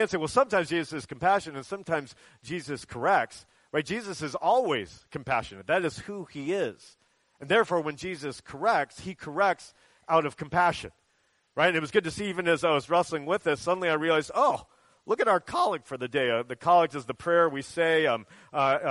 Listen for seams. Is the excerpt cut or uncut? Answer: uncut